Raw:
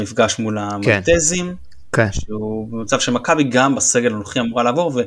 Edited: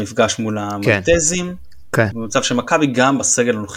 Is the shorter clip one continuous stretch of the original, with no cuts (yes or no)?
no